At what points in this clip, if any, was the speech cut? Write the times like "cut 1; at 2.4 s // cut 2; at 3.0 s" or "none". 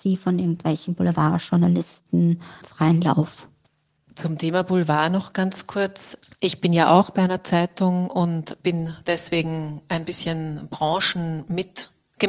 none